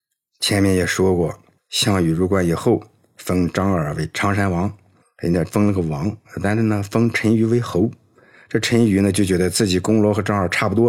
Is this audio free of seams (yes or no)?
yes